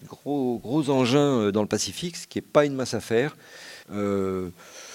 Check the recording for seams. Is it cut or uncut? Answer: cut